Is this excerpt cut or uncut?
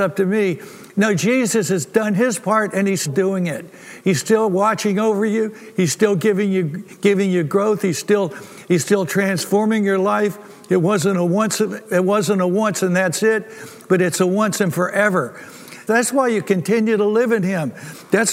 cut